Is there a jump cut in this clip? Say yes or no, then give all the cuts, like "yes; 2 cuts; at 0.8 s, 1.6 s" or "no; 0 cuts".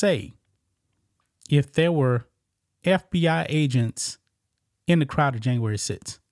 no; 0 cuts